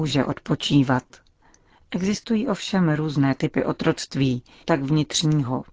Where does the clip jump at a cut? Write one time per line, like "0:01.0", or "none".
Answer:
0:04.6